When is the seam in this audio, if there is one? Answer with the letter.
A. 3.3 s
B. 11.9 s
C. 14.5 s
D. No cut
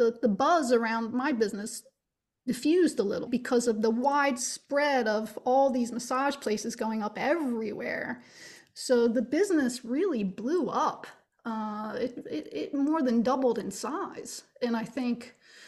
A